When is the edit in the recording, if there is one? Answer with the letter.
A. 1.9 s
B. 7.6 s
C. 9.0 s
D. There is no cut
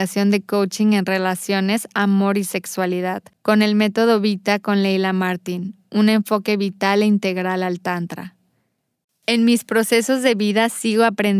C